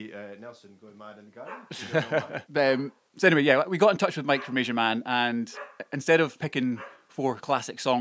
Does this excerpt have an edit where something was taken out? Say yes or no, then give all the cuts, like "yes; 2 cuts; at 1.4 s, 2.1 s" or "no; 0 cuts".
yes; 2 cuts; at 2.4 s, 6.4 s